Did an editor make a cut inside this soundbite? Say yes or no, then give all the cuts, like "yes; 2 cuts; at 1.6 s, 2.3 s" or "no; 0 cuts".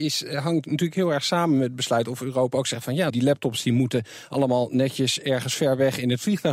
yes; 1 cut; at 3.1 s